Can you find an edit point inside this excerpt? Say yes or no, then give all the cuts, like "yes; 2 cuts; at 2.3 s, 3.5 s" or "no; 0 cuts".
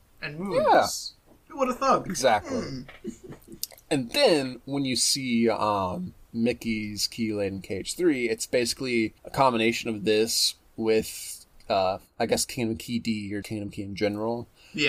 yes; 2 cuts; at 9.2 s, 13.4 s